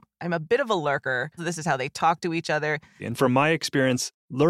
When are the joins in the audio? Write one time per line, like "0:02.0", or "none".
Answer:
0:01.4
0:03.0